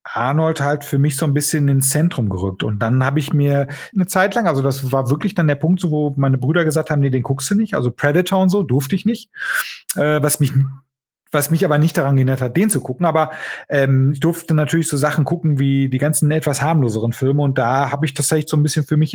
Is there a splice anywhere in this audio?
yes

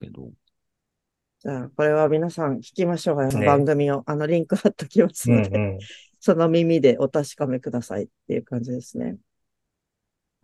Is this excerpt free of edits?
no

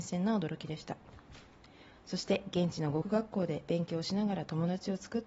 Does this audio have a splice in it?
yes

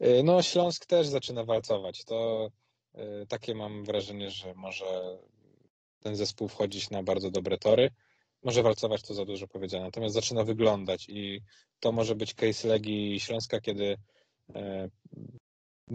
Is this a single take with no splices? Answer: yes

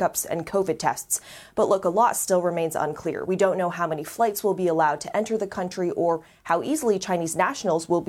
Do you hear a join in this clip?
no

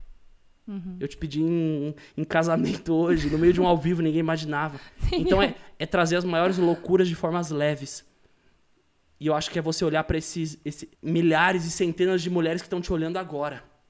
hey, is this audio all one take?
no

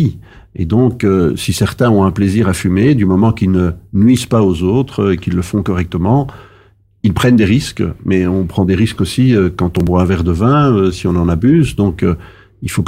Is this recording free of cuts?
yes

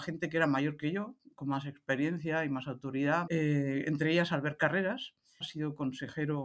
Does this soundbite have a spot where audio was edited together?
yes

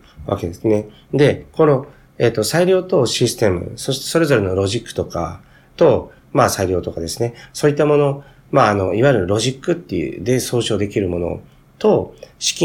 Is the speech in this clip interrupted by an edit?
no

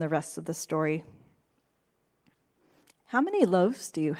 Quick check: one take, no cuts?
yes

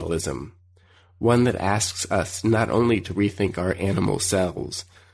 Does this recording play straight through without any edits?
yes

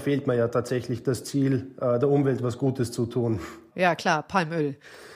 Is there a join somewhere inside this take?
no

